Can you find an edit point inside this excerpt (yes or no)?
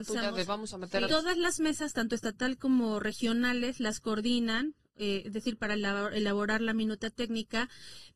yes